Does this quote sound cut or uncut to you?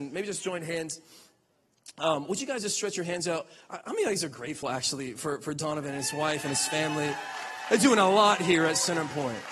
uncut